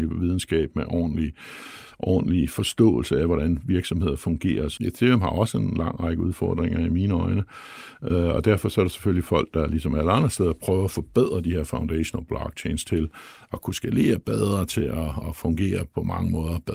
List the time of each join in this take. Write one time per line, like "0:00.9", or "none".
0:04.8
0:15.2